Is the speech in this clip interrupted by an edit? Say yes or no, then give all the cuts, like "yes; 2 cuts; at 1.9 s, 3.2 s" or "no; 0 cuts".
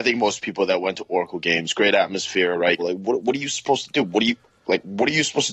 yes; 1 cut; at 2.8 s